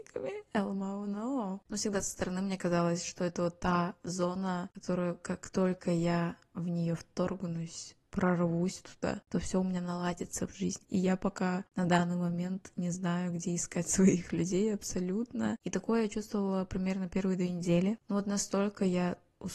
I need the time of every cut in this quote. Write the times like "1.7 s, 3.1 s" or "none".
10.8 s, 15.6 s